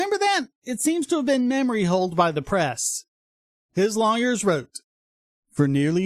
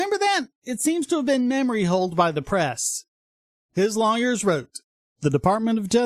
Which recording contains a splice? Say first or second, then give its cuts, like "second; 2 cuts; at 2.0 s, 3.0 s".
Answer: second; 1 cut; at 5.2 s